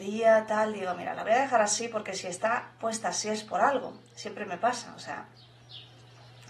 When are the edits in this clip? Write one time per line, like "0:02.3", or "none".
none